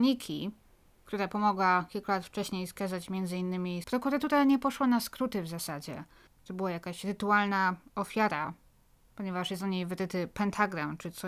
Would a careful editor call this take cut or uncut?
cut